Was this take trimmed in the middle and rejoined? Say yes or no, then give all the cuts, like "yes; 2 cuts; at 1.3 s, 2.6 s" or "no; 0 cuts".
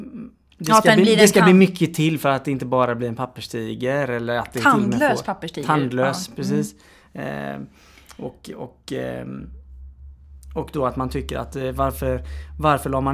no; 0 cuts